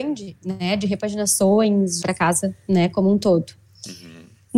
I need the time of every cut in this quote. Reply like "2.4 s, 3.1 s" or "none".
2.0 s